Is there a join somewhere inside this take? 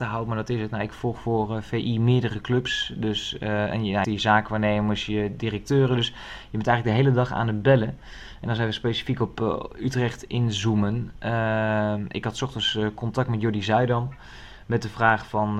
yes; 1 cut; at 4.0 s

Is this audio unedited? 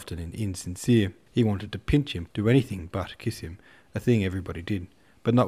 no; 2 cuts; at 1.3 s, 2.3 s

